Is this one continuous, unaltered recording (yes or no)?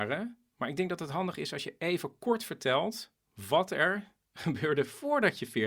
yes